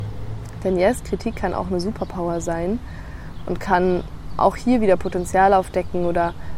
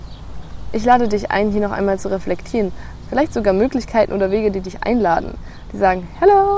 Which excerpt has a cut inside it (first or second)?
second